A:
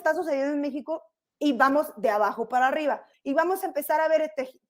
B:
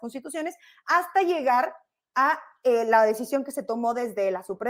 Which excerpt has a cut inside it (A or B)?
A